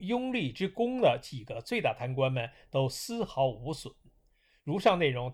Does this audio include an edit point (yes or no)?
no